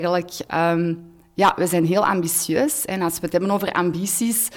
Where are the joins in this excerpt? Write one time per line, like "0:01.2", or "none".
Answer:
none